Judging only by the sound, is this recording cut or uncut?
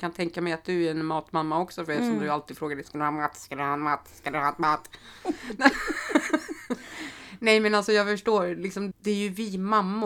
cut